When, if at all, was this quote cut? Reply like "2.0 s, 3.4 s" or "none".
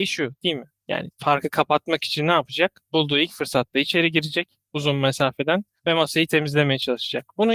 none